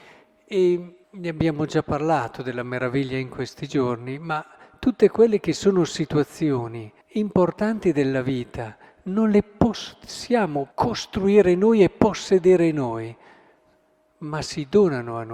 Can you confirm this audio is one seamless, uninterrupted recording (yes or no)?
no